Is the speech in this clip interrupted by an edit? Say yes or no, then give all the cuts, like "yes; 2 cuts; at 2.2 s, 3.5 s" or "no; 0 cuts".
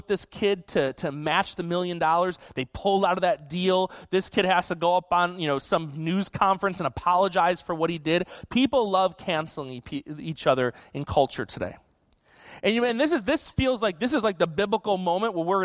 no; 0 cuts